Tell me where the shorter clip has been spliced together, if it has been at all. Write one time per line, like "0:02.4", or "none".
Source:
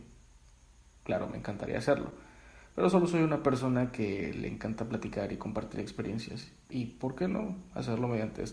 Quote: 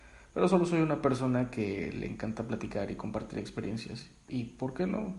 none